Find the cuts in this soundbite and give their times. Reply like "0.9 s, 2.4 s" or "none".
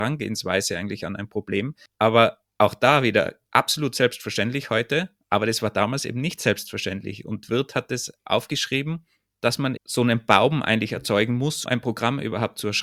9.8 s, 11.7 s

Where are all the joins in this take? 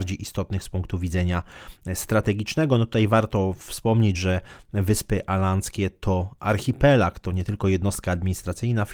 none

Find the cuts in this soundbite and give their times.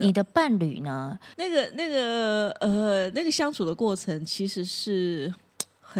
1.3 s

